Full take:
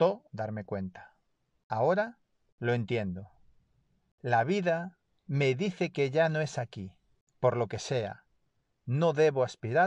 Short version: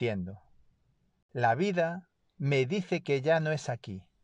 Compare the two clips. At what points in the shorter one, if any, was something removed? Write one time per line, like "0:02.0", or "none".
none